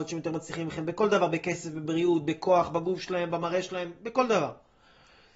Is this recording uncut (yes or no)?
yes